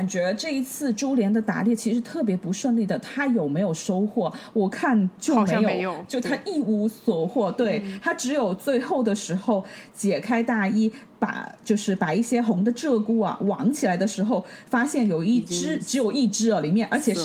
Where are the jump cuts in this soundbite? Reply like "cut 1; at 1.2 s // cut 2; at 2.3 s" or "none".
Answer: none